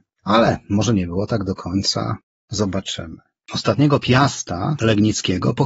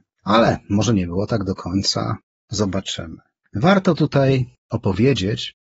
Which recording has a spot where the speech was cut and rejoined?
first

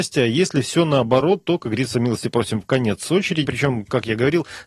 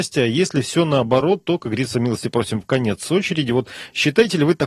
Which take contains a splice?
first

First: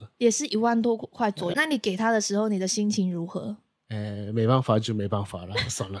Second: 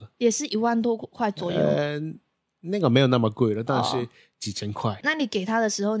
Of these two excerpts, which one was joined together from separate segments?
first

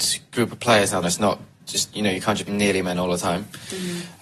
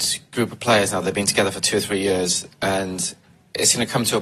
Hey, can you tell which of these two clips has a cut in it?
first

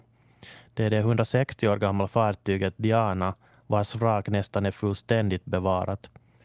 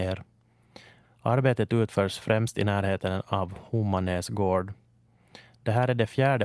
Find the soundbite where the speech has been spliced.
second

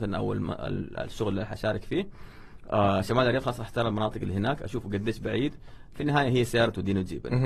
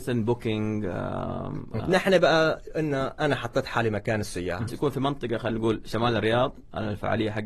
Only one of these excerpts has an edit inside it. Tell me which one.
second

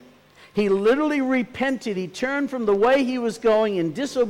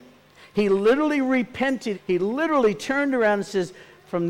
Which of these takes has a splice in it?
second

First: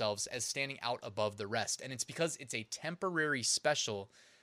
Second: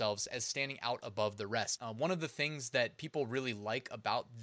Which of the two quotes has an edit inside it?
second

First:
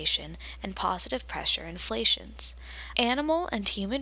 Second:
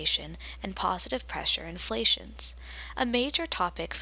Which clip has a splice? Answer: first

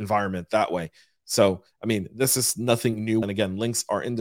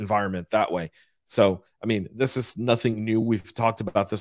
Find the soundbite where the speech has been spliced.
first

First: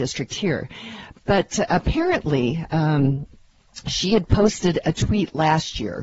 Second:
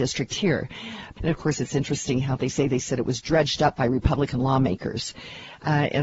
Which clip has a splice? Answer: second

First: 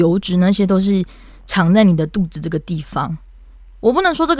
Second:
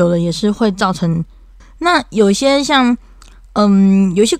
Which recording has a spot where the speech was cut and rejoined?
second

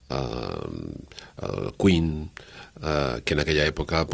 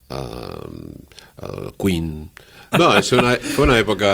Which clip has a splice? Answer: second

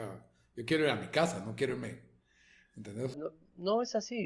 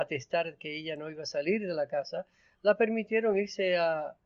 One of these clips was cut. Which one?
first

